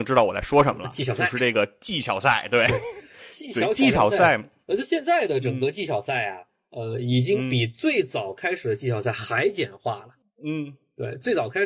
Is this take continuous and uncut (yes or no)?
yes